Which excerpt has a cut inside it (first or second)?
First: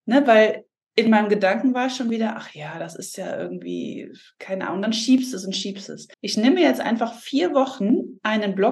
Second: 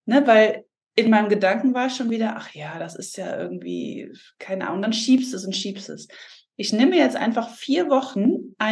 first